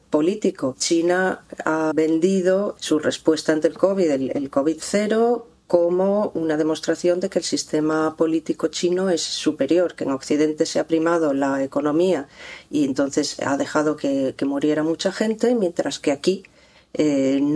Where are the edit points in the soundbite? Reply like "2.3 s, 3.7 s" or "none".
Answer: none